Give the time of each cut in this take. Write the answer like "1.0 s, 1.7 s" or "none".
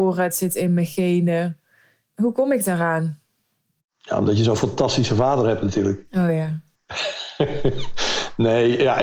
none

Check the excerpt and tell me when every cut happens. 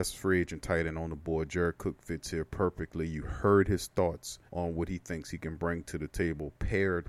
4.5 s

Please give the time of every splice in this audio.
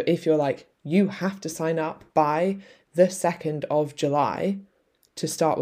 none

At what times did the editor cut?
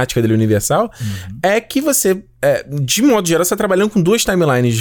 none

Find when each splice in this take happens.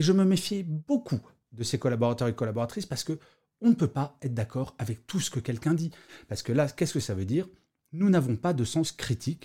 none

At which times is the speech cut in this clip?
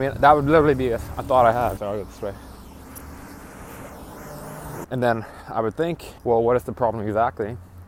1.8 s, 4.8 s, 6.2 s

